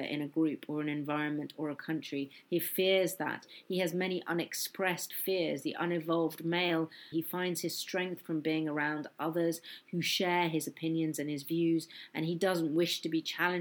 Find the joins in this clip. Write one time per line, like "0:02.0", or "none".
0:07.1

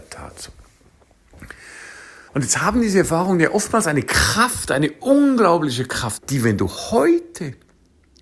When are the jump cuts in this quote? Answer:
0:02.3
0:06.2

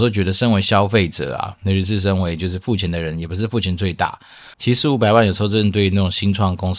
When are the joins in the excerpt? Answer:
0:04.5

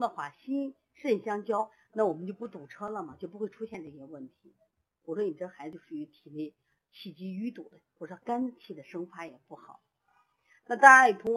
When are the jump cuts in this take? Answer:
0:07.9

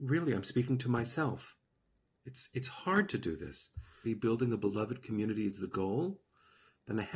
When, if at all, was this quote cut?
0:02.1
0:04.0

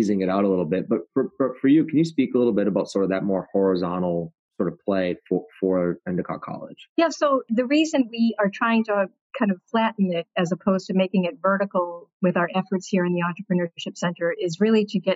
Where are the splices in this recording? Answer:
none

